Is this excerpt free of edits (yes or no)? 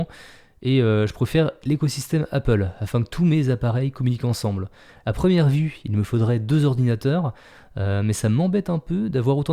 no